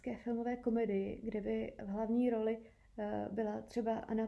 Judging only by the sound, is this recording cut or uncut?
uncut